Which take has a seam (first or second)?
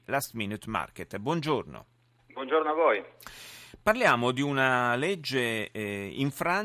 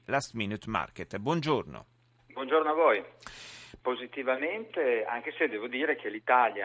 second